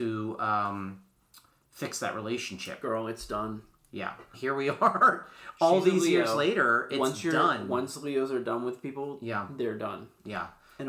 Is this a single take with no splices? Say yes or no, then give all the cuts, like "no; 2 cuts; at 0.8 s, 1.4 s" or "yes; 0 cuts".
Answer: no; 1 cut; at 4.3 s